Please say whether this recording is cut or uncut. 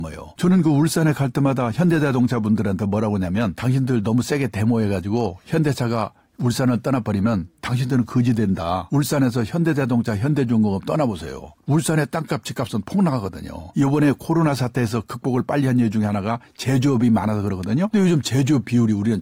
cut